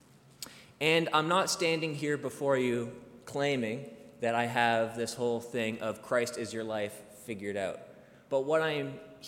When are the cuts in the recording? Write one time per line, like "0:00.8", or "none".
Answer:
0:08.3